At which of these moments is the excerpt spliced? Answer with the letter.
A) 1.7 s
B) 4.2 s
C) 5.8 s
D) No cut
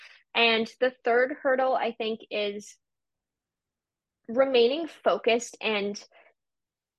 D